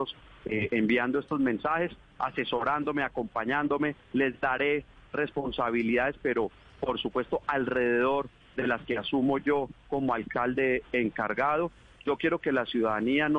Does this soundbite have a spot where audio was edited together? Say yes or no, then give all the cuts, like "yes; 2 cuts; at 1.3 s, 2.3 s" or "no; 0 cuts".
no; 0 cuts